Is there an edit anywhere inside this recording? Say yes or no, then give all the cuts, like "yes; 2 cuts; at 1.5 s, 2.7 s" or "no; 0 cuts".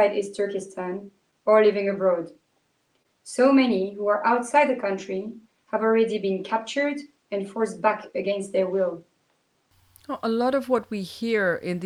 no; 0 cuts